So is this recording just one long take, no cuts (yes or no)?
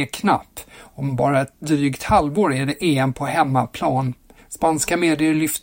no